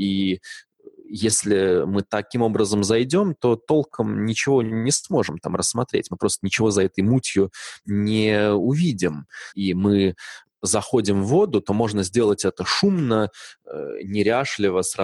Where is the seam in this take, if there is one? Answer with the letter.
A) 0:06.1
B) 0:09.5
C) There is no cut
B